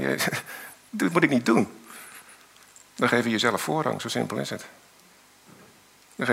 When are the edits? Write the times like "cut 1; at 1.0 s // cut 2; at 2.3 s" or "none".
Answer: none